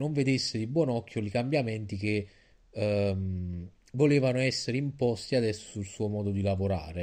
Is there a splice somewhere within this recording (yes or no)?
no